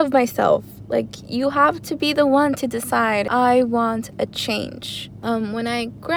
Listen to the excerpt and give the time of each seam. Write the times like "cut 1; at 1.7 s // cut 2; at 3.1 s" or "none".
cut 1; at 5.2 s